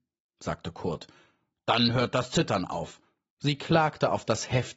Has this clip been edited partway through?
yes; 1 cut; at 3.2 s

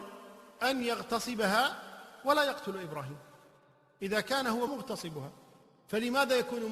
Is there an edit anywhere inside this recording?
yes; 1 cut; at 4.7 s

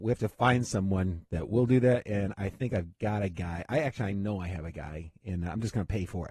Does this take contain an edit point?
no; 0 cuts

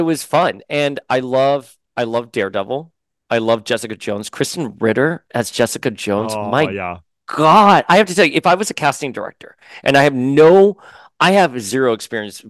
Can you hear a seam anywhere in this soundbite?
no; 0 cuts

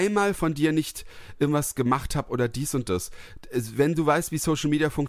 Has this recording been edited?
no; 0 cuts

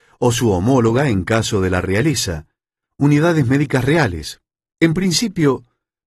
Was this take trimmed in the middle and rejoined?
yes; 1 cut; at 4.7 s

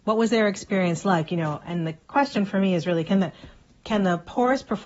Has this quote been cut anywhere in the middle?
no; 0 cuts

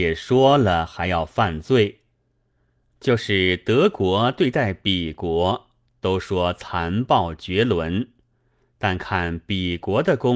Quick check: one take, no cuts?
no; 1 cut; at 2.9 s

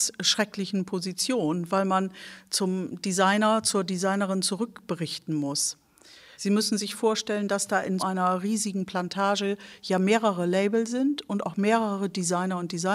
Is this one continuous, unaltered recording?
no; 2 cuts; at 6.3 s, 8.0 s

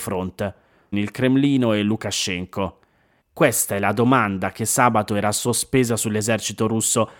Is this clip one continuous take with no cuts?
no; 2 cuts; at 0.9 s, 3.2 s

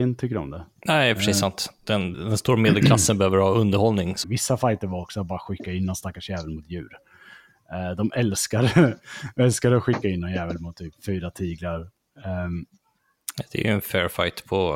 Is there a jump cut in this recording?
yes; 2 cuts; at 2.1 s, 4.2 s

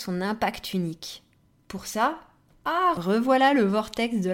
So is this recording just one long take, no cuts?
no; 1 cut; at 1.6 s

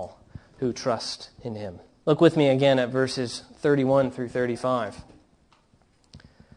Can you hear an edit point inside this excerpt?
yes; 1 cut; at 2.0 s

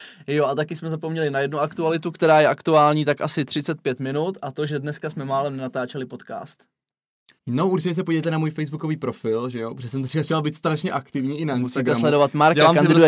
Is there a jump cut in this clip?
yes; 1 cut; at 7.4 s

